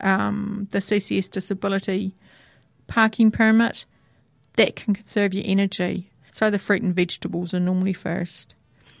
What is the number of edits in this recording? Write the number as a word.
one